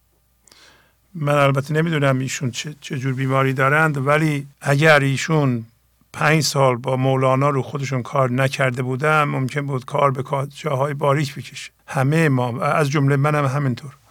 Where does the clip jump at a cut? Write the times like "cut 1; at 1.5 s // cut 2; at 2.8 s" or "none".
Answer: cut 1; at 4.5 s // cut 2; at 11.8 s